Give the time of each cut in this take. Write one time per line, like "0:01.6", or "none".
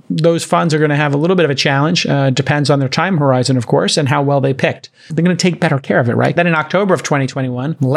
0:05.1
0:06.4